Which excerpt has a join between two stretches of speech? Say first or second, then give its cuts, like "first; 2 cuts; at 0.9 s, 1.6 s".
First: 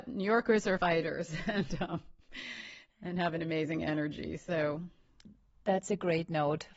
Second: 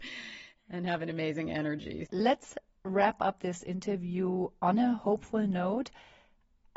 second; 1 cut; at 2.1 s